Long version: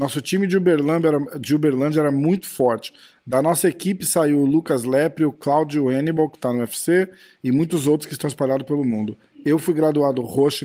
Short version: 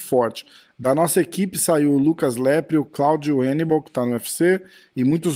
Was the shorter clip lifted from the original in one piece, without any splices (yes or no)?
yes